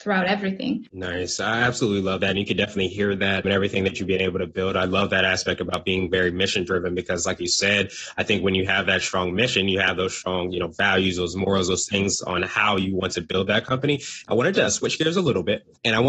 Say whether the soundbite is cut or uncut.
uncut